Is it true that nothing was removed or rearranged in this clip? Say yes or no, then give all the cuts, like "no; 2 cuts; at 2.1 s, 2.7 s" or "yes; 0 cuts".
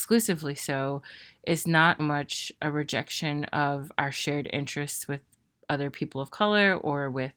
no; 1 cut; at 2.0 s